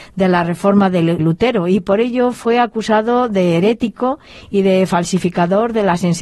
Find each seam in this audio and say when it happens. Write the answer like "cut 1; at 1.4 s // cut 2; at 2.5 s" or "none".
cut 1; at 1.2 s